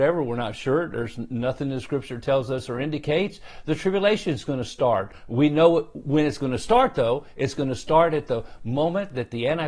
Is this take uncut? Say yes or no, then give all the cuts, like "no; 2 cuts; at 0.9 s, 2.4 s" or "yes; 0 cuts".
yes; 0 cuts